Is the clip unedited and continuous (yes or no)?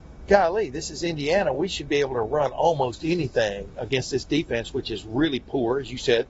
yes